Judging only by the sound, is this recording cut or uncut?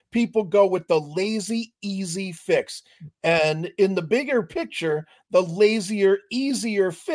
uncut